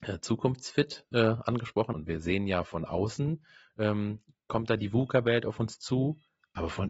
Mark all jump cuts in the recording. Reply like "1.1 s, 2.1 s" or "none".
1.9 s